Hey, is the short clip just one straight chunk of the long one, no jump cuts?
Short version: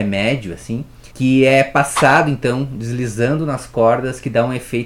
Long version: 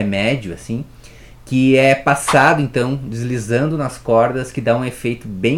no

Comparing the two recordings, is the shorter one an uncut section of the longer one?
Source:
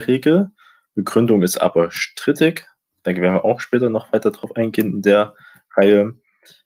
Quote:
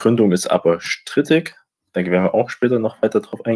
yes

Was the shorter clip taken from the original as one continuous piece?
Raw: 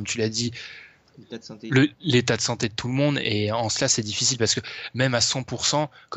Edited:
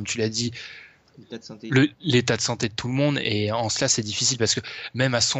yes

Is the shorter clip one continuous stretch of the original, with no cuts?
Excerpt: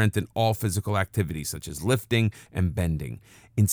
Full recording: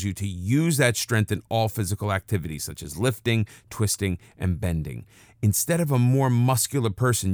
no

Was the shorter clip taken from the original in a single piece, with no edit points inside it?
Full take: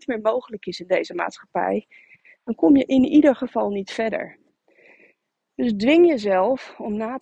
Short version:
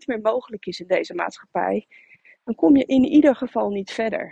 yes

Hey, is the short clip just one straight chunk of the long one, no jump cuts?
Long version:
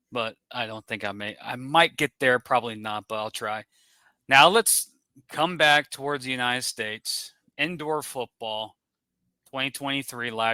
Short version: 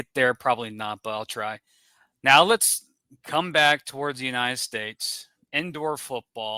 yes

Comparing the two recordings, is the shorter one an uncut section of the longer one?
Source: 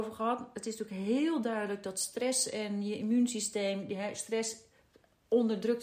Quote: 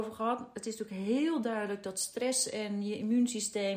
yes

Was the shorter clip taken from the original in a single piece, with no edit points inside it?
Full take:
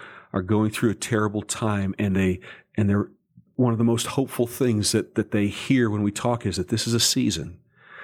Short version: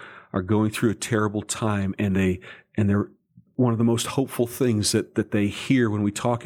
yes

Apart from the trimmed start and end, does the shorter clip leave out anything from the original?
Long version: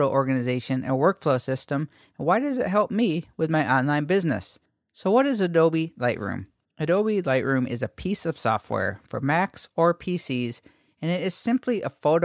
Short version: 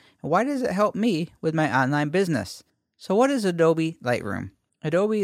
no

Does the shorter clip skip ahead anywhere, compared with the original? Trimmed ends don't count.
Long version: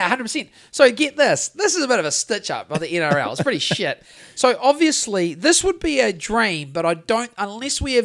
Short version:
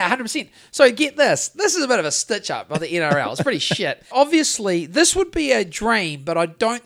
yes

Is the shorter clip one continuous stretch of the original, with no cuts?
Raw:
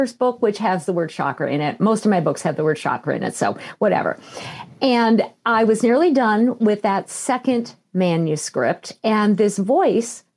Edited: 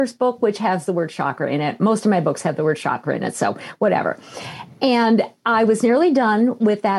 yes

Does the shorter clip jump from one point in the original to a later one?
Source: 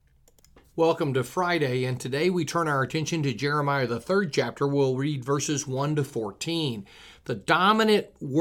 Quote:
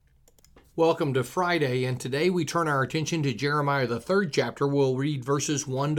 no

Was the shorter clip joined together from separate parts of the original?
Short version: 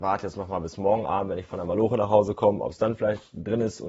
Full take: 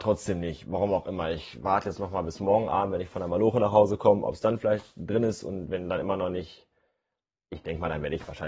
no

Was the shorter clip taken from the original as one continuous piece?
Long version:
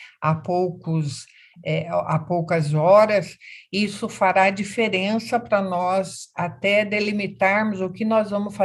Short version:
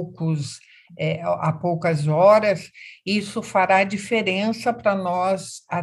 yes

